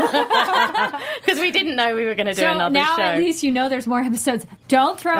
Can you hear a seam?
no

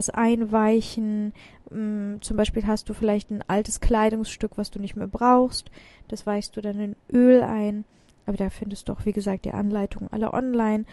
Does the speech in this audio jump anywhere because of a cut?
no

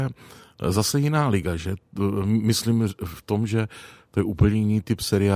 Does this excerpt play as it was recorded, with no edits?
yes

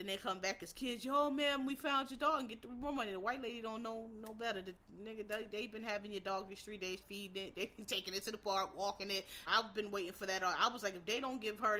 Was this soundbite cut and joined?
yes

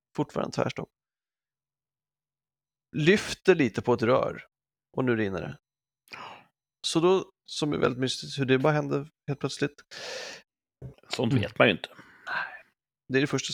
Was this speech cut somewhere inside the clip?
yes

